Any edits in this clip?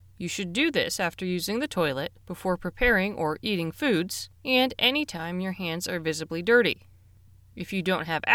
yes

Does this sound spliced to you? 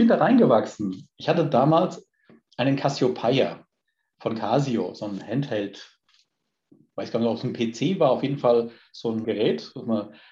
yes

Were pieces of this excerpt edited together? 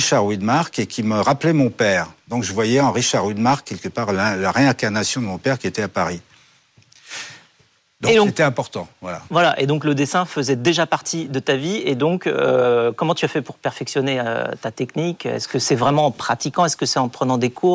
yes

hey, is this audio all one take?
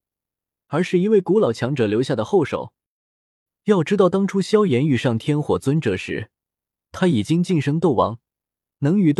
yes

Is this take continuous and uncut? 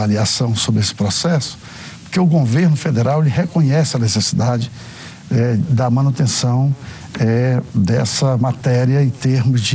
yes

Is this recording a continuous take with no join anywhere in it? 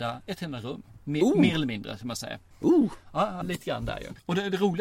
no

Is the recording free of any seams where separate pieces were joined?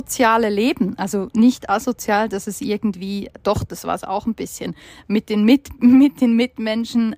yes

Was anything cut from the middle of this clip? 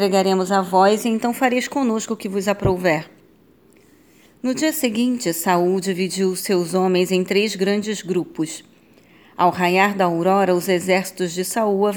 no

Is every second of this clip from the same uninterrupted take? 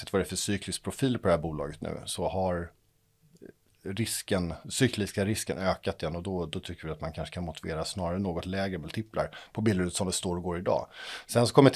yes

